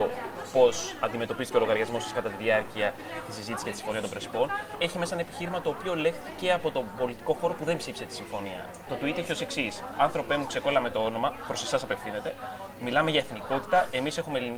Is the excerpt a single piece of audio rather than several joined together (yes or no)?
yes